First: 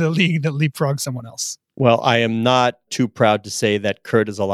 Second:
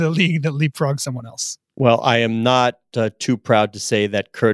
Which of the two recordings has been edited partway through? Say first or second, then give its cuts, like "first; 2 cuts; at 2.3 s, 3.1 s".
first; 1 cut; at 2.9 s